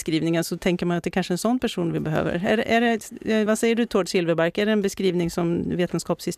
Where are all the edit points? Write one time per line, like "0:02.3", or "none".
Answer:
none